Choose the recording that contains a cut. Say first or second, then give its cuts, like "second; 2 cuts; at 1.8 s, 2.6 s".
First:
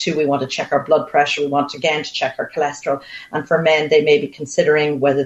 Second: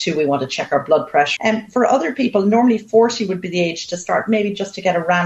second; 1 cut; at 1.4 s